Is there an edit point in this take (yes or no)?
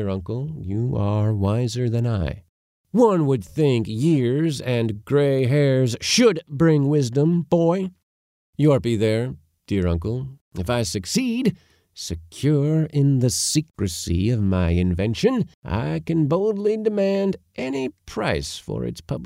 yes